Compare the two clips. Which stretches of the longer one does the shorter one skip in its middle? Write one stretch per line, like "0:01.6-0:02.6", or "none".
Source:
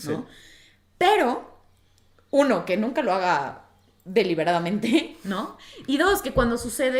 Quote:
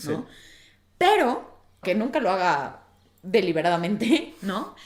0:01.8-0:02.7